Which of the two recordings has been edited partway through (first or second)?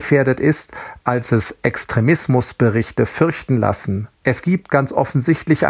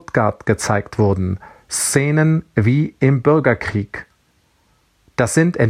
first